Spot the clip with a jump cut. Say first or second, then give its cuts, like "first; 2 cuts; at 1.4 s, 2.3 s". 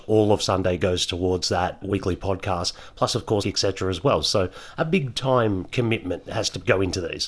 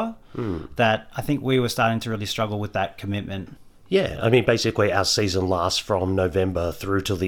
first; 1 cut; at 3.4 s